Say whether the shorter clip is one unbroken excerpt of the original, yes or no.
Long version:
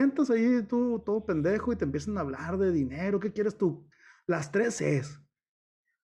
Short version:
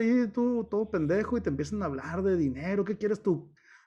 yes